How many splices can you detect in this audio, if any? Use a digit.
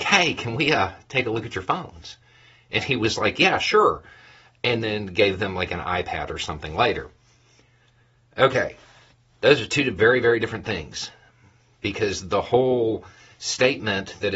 0